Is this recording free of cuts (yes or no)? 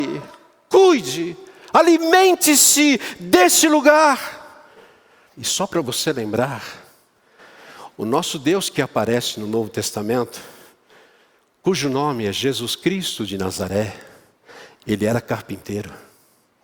no